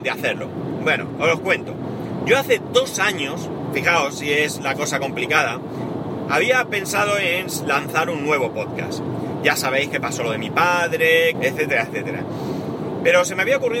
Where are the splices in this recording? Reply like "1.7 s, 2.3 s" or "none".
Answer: 11.3 s